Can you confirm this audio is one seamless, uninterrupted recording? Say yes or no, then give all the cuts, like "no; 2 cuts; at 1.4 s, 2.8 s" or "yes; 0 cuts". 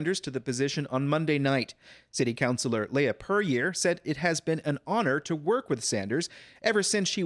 yes; 0 cuts